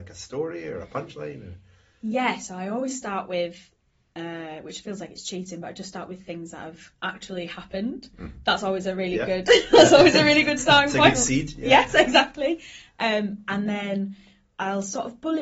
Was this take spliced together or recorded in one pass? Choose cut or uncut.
uncut